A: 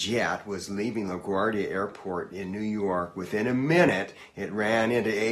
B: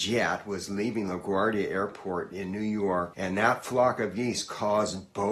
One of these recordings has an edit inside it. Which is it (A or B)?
B